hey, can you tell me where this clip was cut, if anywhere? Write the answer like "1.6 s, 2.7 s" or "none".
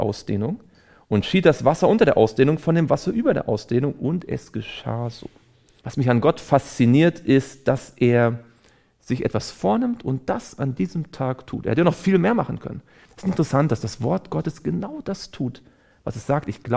5.8 s, 13.1 s

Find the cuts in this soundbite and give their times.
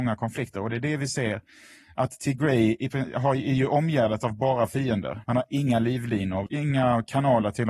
5.2 s, 6.5 s

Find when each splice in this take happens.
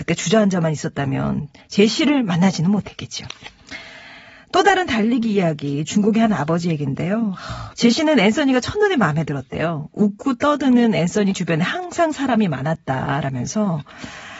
7.7 s

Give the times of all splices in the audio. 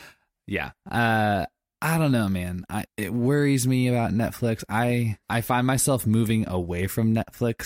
2.9 s, 5.2 s

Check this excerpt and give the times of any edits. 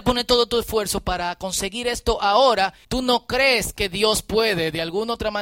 2.8 s

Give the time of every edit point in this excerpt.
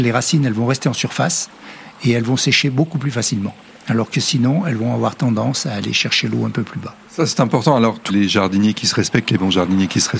8.1 s

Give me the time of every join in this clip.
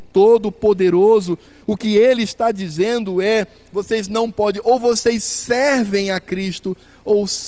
none

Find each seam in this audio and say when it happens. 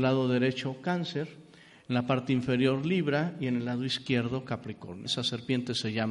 5.1 s

